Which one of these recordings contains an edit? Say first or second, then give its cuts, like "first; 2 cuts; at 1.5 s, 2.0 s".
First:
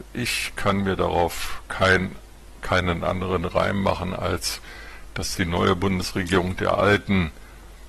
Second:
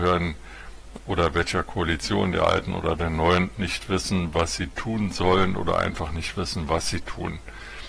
second; 1 cut; at 3.6 s